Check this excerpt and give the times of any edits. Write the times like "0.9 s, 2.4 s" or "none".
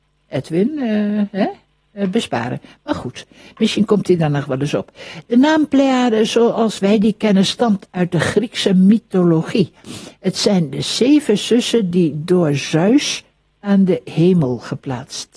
none